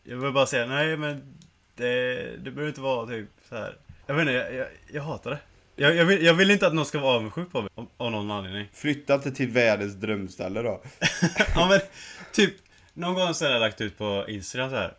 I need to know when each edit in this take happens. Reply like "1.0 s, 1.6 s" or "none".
4.0 s, 5.8 s, 7.7 s